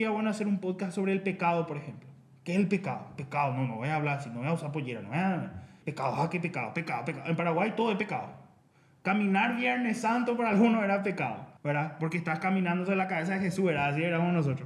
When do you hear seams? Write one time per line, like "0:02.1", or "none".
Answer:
0:05.8
0:11.6